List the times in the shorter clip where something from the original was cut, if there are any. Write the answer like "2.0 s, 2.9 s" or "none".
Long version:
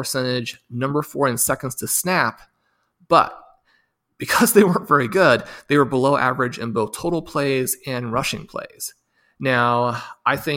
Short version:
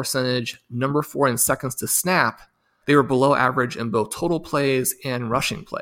2.8 s